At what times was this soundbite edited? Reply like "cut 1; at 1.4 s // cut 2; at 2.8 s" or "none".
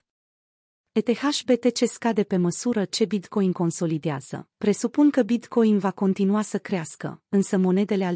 cut 1; at 4.5 s